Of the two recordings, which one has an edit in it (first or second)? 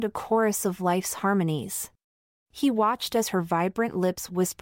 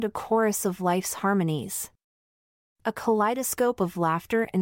first